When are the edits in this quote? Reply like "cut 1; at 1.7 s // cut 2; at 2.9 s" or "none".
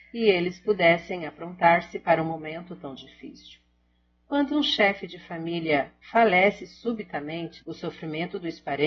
cut 1; at 7.6 s